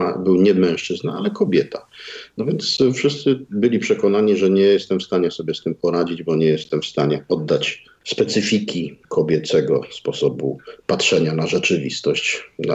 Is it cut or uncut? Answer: uncut